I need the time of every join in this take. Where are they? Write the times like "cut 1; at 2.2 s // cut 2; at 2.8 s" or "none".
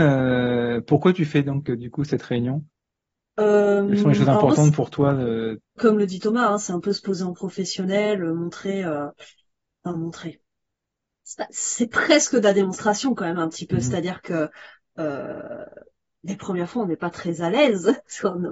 cut 1; at 5.8 s